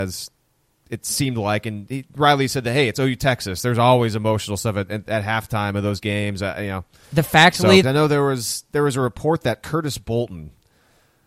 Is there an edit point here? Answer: yes; 1 cut; at 7.8 s

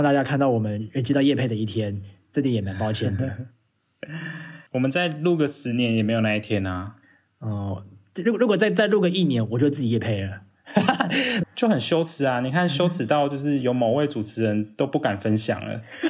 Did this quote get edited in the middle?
yes; 1 cut; at 11.4 s

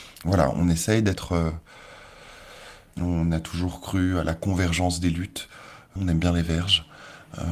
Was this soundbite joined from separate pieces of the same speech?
yes; 2 cuts; at 2.9 s, 6.0 s

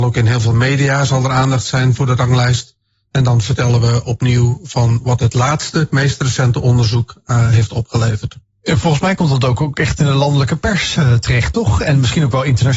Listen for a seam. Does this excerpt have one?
no; 0 cuts

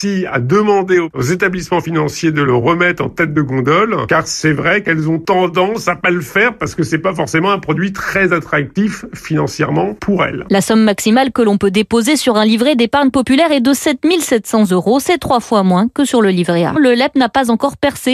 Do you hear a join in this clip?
yes; 1 cut; at 16.8 s

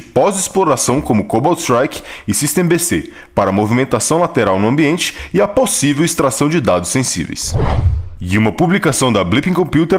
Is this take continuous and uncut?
yes; 0 cuts

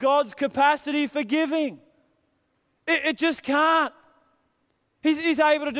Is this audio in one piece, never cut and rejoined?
yes; 0 cuts

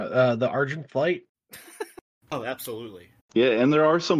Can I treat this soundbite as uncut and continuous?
no; 2 cuts; at 1.3 s, 3.2 s

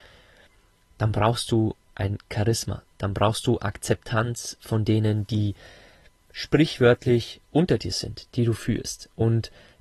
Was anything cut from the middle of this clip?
yes; 1 cut; at 8.3 s

